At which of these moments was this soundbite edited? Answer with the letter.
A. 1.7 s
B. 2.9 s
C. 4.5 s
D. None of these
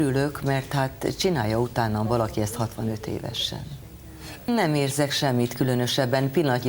C